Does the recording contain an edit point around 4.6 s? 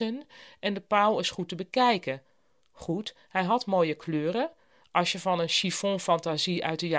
no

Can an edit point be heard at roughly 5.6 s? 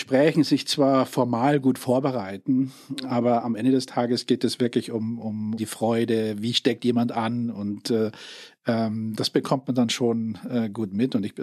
yes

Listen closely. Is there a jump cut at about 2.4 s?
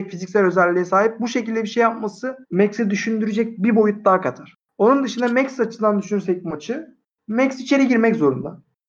yes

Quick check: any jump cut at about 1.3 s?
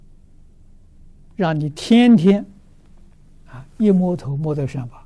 yes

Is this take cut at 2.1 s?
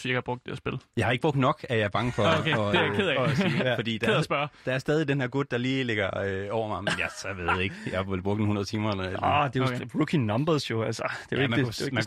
no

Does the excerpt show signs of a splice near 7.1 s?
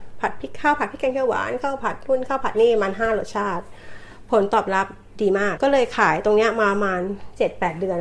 no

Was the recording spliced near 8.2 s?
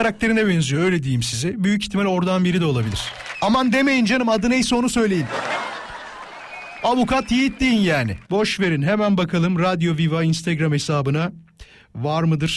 yes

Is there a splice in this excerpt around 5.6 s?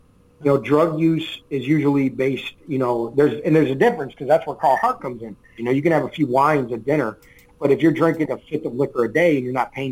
yes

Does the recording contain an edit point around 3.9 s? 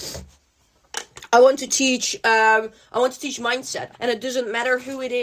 yes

